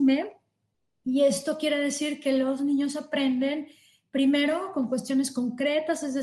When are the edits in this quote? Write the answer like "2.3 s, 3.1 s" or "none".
none